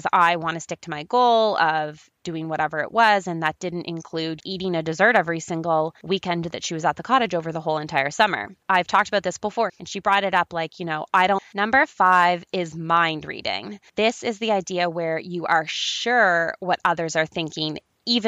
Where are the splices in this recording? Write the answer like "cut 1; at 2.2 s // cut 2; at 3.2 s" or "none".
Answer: cut 1; at 4.4 s // cut 2; at 9.7 s // cut 3; at 11.4 s